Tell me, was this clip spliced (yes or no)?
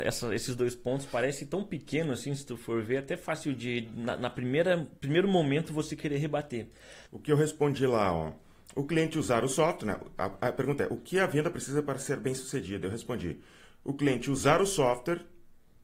yes